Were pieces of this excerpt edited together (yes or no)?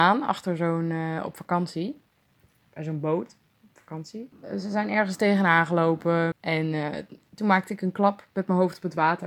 yes